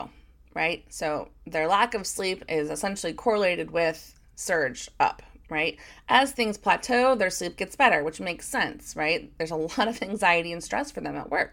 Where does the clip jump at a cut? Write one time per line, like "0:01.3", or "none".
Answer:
none